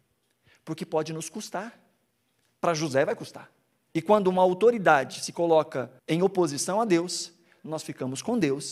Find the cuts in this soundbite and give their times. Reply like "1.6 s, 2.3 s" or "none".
3.9 s, 6.0 s